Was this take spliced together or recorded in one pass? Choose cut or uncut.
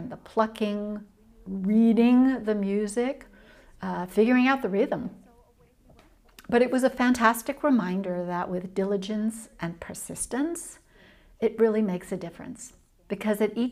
uncut